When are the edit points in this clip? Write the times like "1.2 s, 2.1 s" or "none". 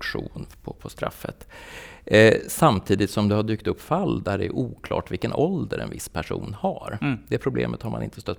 none